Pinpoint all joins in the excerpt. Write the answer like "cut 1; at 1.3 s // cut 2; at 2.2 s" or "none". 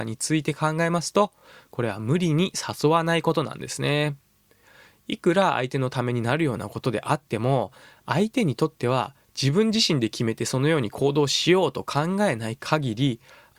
none